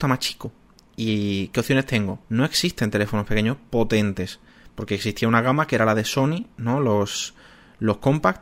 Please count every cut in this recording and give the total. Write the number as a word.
one